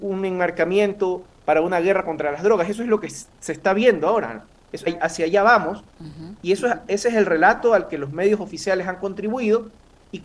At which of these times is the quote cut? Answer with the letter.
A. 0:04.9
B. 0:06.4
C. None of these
A